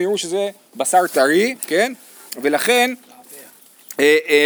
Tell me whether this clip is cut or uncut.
cut